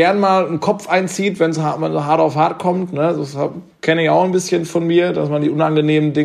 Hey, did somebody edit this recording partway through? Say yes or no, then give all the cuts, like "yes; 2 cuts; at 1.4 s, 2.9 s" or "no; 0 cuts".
no; 0 cuts